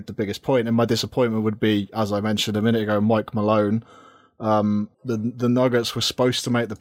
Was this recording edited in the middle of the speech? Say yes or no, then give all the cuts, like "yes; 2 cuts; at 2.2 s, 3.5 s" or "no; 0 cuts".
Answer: yes; 1 cut; at 4.9 s